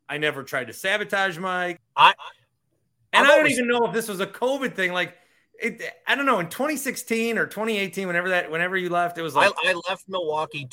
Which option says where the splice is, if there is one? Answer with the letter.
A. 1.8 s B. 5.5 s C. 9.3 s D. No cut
A